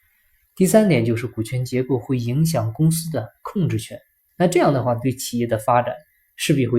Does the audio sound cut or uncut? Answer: cut